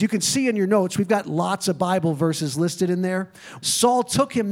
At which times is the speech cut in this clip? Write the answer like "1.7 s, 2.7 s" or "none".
3.6 s